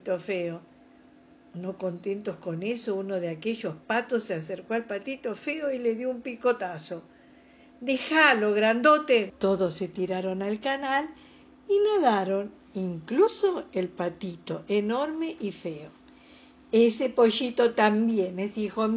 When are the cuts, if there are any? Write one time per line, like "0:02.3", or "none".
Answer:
0:09.3